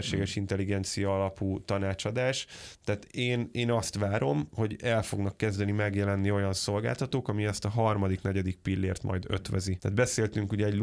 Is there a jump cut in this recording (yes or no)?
no